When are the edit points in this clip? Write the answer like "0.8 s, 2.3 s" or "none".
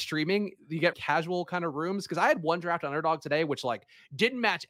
0.9 s